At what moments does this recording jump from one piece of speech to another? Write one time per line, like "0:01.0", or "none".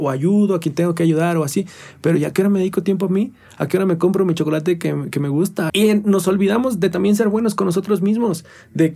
0:05.7

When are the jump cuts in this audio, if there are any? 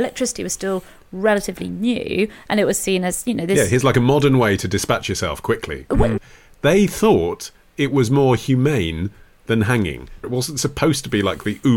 0:06.2
0:10.2

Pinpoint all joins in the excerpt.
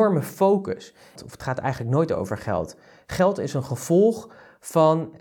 0:01.2

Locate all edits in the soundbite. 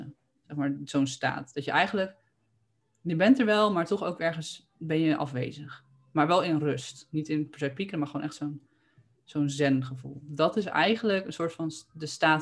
none

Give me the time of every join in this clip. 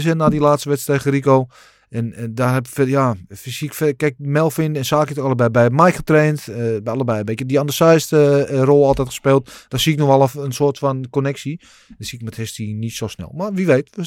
none

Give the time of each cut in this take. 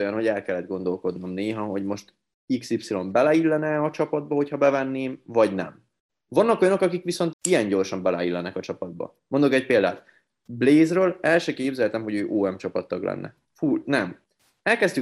0:07.3

